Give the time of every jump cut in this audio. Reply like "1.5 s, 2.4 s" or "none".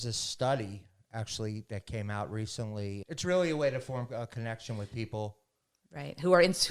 3.0 s